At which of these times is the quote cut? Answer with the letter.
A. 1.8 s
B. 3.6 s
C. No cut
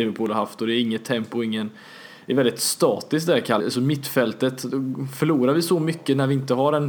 B